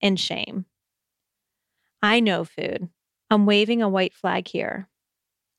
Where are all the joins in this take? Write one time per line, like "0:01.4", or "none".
0:03.2